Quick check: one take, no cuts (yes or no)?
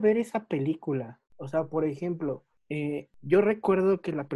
no